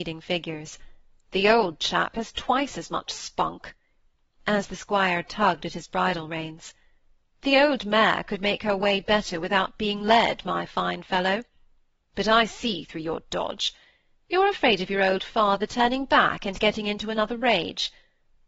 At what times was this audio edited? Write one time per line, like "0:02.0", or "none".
none